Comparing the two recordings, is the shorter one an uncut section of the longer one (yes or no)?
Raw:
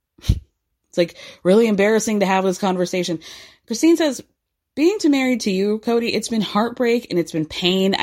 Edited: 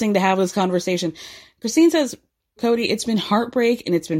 no